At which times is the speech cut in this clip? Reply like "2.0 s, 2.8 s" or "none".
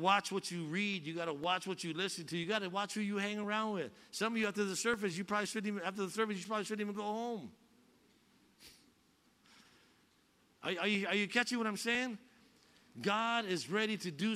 none